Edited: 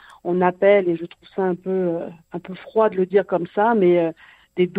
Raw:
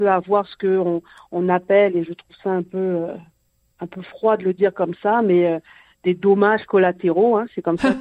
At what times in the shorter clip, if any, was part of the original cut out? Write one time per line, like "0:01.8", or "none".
0:02.2